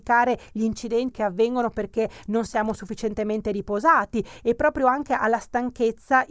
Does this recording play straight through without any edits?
no; 1 cut; at 1.1 s

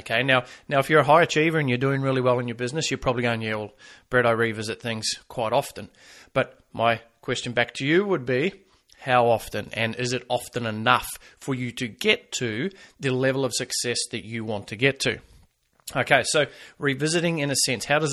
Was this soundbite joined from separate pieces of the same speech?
no; 0 cuts

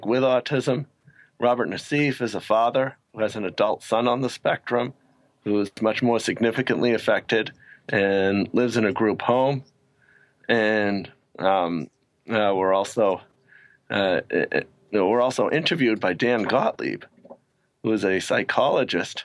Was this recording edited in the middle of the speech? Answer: no; 0 cuts

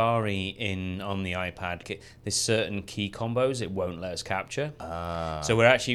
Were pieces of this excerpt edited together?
yes; 1 cut; at 1.8 s

